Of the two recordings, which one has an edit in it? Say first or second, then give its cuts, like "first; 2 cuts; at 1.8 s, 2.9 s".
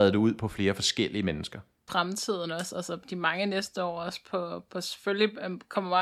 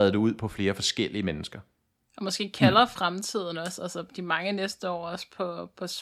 first; 1 cut; at 1.9 s